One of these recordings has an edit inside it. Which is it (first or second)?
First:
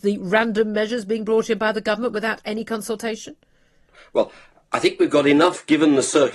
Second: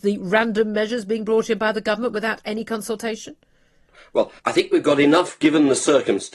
second